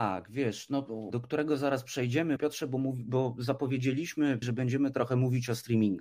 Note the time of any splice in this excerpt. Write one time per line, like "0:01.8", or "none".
0:01.1
0:02.4
0:04.4